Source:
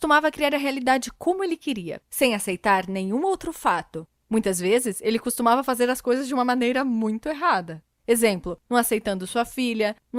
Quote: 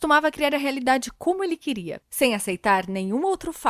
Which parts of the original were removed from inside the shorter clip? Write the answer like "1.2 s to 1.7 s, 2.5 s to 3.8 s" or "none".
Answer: none